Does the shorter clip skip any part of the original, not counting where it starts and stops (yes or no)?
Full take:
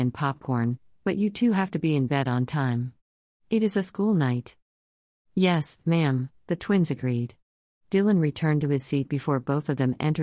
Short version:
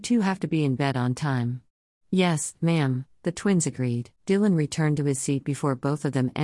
yes